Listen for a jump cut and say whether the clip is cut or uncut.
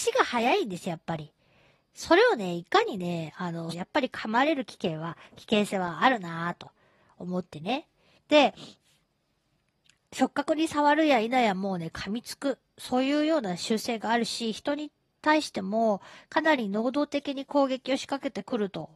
cut